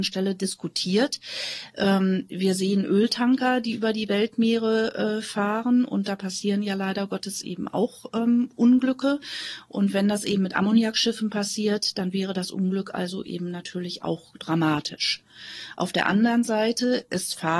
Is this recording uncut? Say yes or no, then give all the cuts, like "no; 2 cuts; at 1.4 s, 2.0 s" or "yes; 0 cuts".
yes; 0 cuts